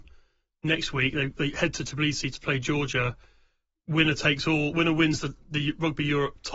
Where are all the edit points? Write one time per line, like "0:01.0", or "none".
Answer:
none